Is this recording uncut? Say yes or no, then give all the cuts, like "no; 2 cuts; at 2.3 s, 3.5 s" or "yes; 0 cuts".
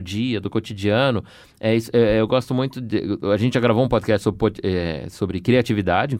yes; 0 cuts